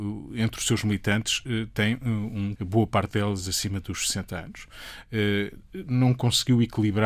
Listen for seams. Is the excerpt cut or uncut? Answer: cut